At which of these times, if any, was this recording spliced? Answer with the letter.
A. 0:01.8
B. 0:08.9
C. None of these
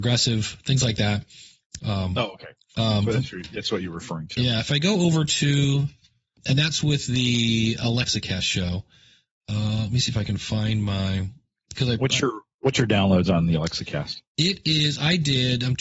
A